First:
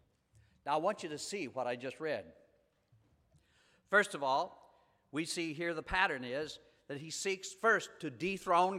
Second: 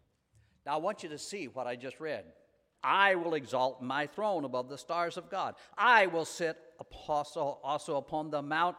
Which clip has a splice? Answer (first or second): second